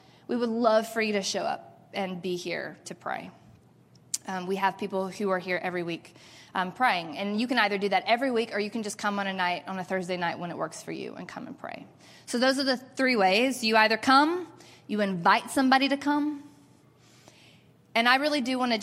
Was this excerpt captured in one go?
yes; 0 cuts

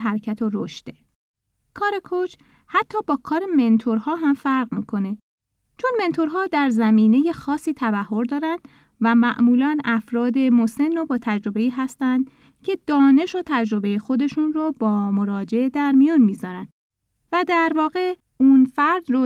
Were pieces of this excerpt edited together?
no; 0 cuts

